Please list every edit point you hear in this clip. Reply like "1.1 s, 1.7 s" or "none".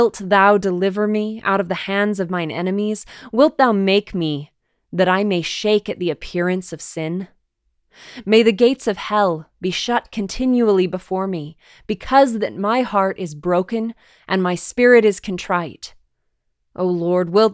none